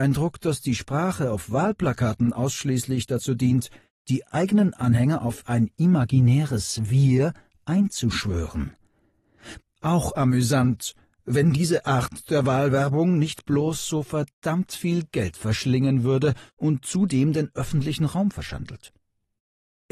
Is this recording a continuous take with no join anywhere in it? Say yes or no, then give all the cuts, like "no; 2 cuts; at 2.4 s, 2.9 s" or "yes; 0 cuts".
no; 1 cut; at 9.6 s